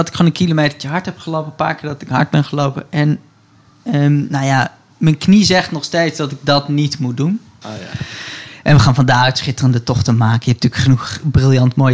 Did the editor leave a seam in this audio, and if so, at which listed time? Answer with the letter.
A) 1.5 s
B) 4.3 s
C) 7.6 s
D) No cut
C